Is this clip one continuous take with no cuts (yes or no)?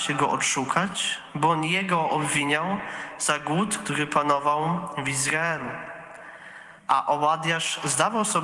no